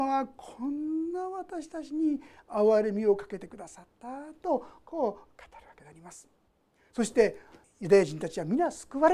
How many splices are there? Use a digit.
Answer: 1